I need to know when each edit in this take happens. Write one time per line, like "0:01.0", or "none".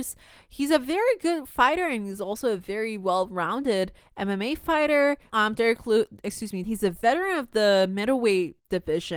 0:05.3
0:06.6